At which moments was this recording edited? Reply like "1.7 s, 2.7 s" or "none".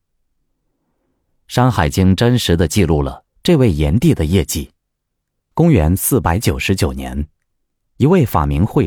5.4 s